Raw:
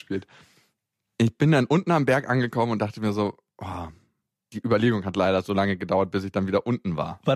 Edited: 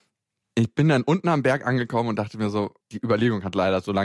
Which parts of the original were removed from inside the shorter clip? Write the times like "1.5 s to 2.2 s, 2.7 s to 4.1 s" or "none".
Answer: 3.4 s to 4.4 s